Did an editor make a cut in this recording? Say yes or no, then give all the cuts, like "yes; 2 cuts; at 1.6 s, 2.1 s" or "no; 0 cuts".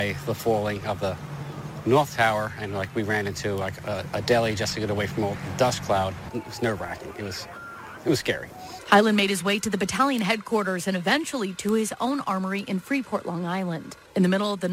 no; 0 cuts